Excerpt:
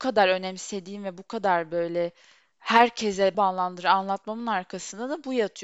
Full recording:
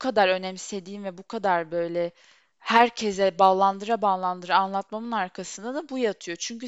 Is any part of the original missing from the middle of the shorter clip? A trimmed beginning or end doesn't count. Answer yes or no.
yes